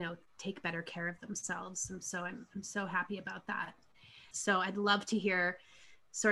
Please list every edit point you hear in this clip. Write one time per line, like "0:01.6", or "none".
0:04.3